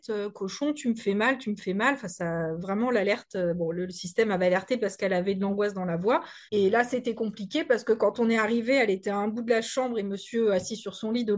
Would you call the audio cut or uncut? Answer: cut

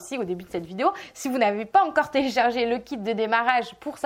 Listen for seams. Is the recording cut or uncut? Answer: uncut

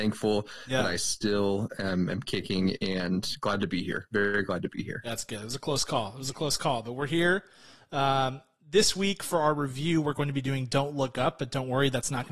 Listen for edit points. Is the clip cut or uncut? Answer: uncut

